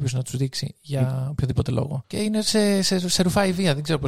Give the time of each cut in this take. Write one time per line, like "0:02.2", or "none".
0:02.0